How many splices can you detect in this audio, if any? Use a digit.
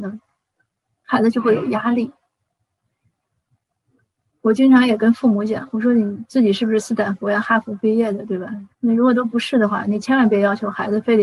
1